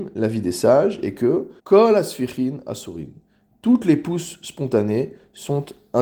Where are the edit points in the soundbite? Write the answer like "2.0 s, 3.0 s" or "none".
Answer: 1.6 s

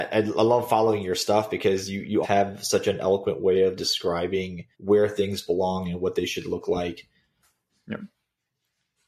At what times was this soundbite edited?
2.2 s, 4.7 s, 7.7 s

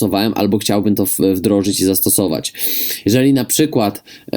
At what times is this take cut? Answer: none

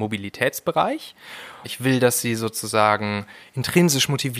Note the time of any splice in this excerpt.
1.6 s

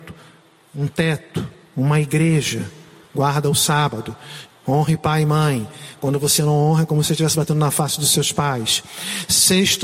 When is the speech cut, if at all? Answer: 4.5 s

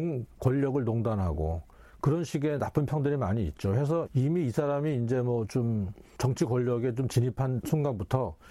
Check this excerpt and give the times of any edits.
4.1 s

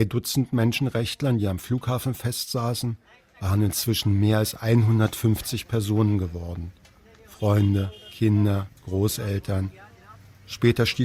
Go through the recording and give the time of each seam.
none

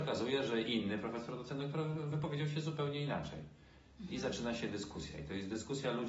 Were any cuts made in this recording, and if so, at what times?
none

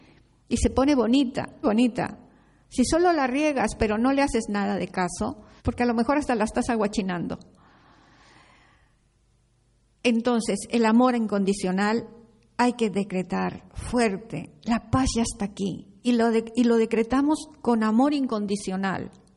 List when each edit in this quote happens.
1.6 s, 5.6 s

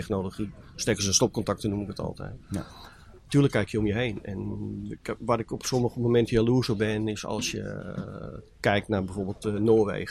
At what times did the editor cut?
none

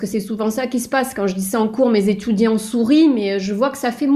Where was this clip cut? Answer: none

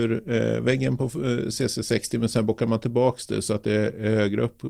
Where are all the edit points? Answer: none

